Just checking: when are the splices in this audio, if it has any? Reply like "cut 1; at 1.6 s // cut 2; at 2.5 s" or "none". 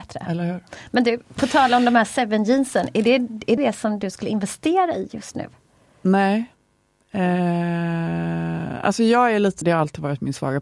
cut 1; at 3.6 s // cut 2; at 9.6 s

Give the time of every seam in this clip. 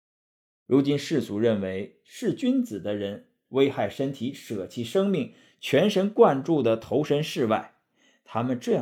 none

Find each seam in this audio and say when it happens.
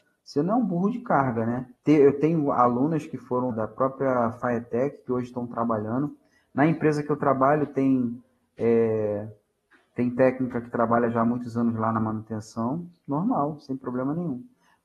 cut 1; at 1.7 s // cut 2; at 3.5 s

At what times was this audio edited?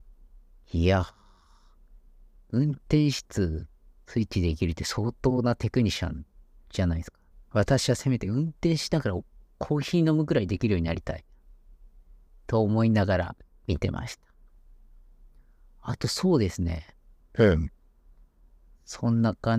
cut 1; at 3.2 s // cut 2; at 7.3 s // cut 3; at 17.2 s

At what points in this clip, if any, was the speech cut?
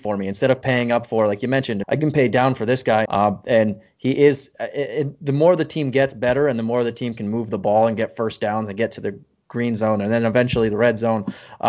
cut 1; at 1.8 s // cut 2; at 3.1 s

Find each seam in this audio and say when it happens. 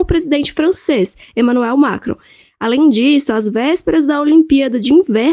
none

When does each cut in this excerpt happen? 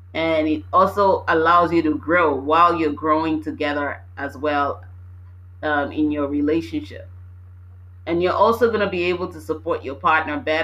none

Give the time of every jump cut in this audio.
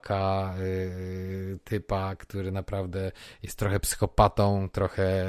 none

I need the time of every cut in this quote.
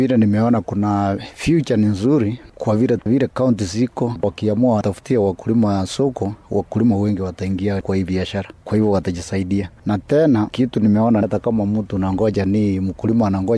none

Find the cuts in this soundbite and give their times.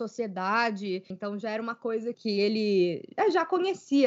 cut 1; at 1.1 s // cut 2; at 2.1 s

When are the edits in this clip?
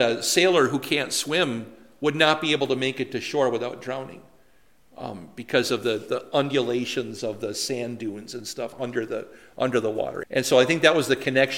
cut 1; at 10.2 s

